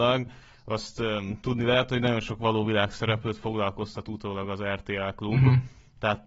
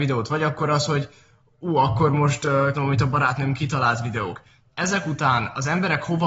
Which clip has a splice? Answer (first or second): second